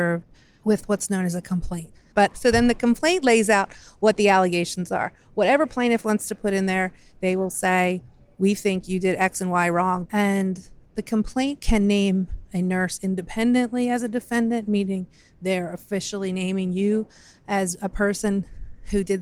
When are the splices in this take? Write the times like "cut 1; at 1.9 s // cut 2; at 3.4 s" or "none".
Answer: cut 1; at 2.1 s // cut 2; at 10.1 s